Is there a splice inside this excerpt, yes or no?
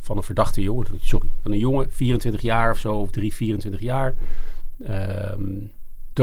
no